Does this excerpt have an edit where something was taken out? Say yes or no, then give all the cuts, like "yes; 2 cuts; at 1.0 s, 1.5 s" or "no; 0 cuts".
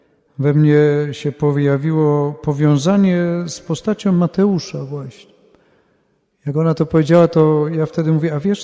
no; 0 cuts